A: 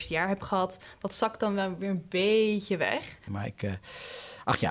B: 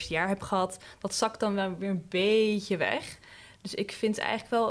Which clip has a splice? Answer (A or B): A